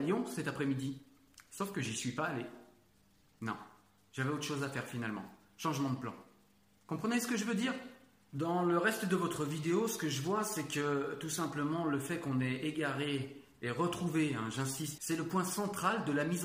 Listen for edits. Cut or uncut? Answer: cut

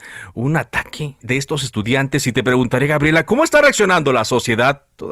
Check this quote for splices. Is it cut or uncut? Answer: cut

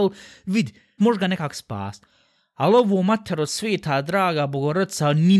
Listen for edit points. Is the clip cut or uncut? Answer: cut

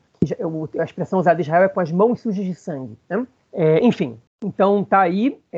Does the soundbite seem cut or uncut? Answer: uncut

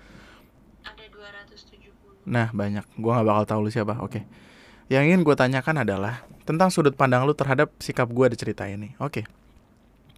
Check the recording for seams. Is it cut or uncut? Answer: uncut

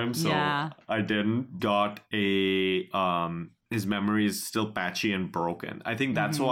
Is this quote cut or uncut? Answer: cut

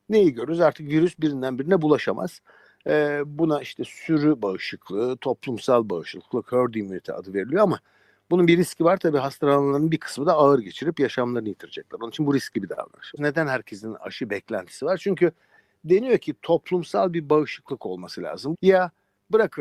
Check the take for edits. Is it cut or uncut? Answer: cut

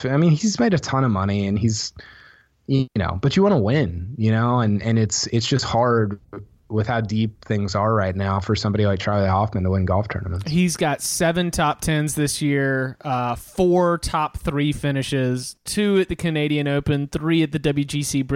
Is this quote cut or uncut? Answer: uncut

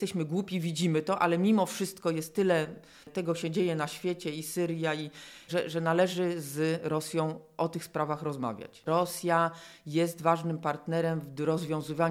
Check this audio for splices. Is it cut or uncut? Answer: cut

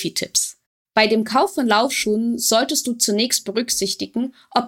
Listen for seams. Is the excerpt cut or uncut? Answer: uncut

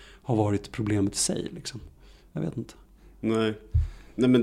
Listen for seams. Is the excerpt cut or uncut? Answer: uncut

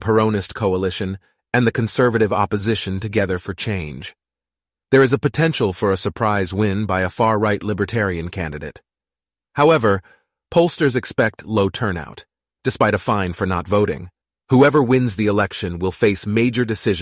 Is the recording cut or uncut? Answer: cut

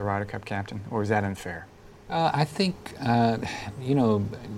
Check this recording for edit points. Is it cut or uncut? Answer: uncut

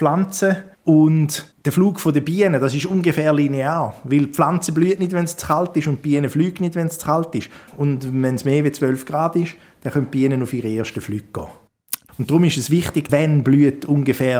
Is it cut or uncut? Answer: cut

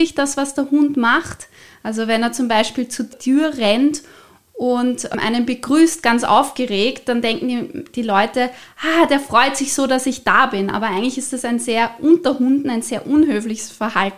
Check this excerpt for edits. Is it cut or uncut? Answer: uncut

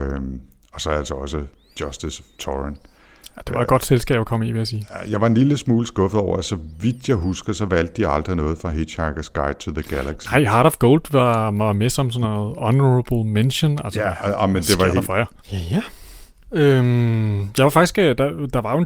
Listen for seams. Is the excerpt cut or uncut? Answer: cut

